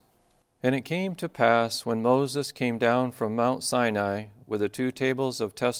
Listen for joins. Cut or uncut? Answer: uncut